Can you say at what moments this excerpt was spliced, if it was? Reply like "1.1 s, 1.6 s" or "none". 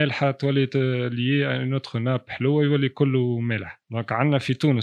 3.8 s